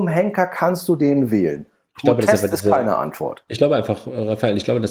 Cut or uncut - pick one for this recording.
uncut